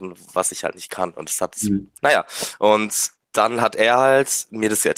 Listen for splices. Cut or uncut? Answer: cut